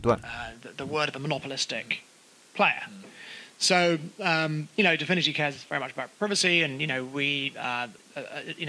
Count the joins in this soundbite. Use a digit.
0